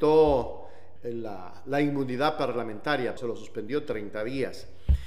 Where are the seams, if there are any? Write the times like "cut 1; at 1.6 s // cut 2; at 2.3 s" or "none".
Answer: cut 1; at 1.0 s // cut 2; at 3.2 s